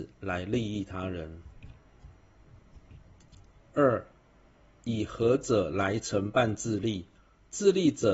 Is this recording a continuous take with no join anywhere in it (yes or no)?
yes